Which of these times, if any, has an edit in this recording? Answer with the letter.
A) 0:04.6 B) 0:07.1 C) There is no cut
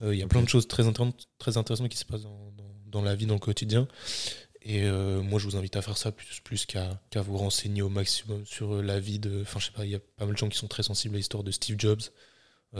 B